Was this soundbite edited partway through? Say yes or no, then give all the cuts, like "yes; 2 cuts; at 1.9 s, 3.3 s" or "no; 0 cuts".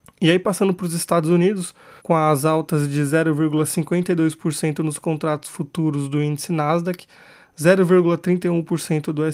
yes; 1 cut; at 2.0 s